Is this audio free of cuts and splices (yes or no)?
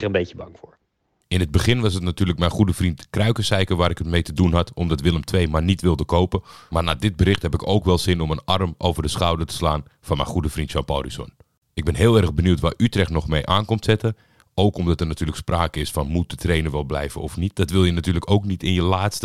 yes